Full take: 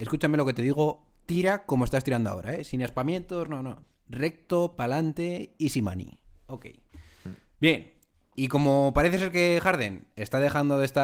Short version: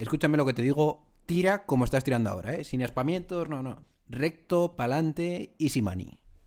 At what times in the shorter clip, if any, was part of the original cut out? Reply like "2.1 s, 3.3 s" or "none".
none